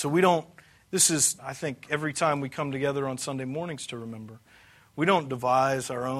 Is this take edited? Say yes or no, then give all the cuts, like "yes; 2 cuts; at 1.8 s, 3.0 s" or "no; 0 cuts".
yes; 1 cut; at 1.4 s